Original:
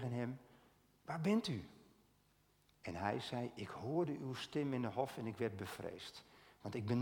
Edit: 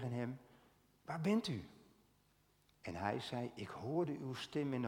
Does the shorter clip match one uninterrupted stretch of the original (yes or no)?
yes